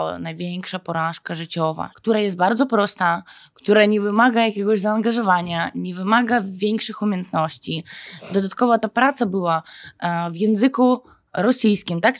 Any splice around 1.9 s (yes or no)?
yes